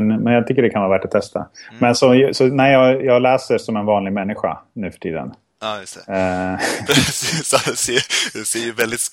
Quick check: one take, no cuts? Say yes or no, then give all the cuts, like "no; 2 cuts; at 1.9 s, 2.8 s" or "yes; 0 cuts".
yes; 0 cuts